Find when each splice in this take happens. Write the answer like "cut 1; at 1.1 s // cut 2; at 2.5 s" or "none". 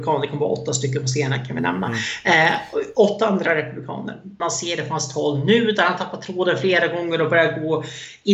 cut 1; at 4.4 s

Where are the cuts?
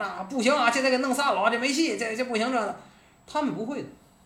none

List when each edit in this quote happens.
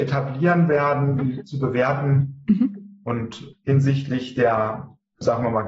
cut 1; at 1.2 s // cut 2; at 3.0 s

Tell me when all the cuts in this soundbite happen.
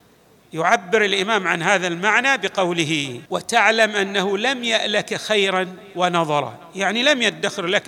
cut 1; at 3.3 s

